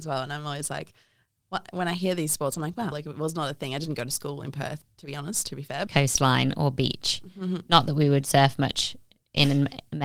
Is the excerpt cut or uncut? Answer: cut